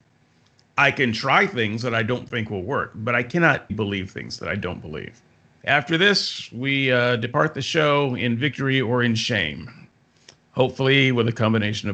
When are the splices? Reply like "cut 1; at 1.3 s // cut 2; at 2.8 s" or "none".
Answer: cut 1; at 3.7 s // cut 2; at 5.6 s